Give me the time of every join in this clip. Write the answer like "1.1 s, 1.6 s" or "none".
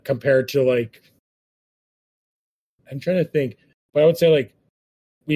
3.9 s